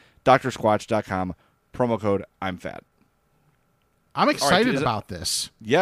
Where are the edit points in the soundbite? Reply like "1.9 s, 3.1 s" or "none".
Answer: none